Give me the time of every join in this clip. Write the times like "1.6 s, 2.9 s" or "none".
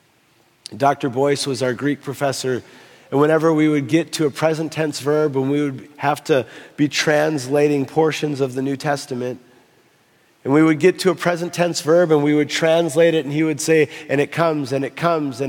none